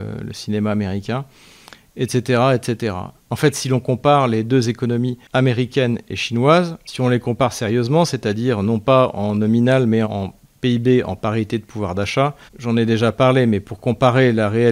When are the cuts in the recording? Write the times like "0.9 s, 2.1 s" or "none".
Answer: 3.3 s, 10.0 s, 12.5 s